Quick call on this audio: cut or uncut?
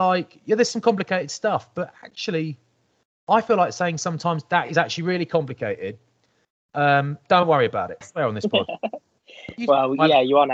cut